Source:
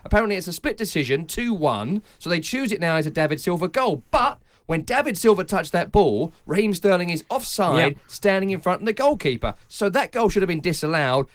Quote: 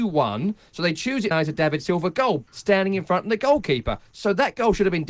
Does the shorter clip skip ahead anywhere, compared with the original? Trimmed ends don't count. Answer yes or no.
yes